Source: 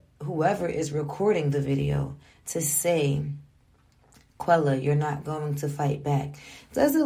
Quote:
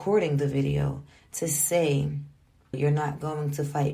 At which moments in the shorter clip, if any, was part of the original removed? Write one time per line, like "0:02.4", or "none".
0:02.7